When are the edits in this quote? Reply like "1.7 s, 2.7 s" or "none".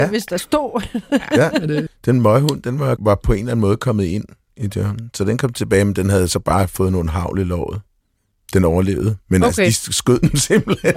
1.9 s, 3.0 s